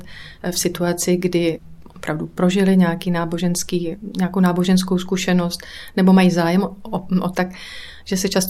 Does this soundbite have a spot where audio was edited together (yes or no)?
yes